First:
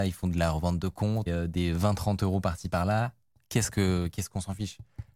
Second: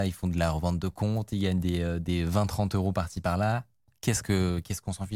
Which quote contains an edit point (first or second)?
first